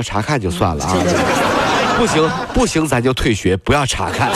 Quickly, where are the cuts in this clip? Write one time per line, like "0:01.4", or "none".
none